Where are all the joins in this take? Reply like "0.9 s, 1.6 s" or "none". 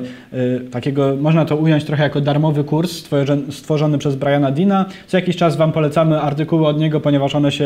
none